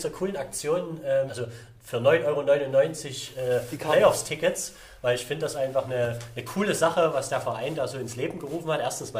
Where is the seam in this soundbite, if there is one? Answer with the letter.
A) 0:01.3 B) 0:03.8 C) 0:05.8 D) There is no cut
A